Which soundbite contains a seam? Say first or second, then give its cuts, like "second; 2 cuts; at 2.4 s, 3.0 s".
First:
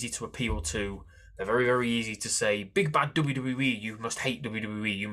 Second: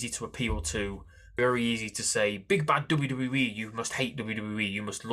second; 1 cut; at 1.4 s